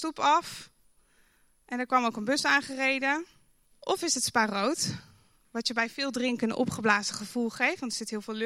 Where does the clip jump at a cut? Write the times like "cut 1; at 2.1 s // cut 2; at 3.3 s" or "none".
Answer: cut 1; at 3.7 s